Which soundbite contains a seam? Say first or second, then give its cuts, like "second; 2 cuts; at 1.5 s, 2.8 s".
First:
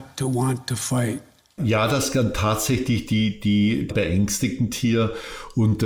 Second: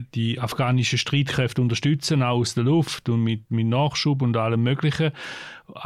first; 2 cuts; at 1.6 s, 3.9 s